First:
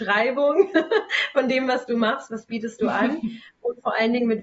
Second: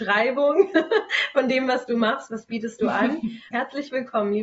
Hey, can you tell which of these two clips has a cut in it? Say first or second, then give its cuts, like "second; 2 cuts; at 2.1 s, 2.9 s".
second; 1 cut; at 3.5 s